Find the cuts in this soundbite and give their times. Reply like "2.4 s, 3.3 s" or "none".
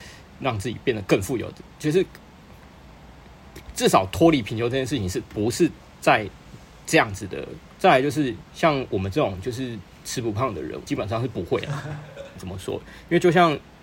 7.8 s, 10.9 s, 12.4 s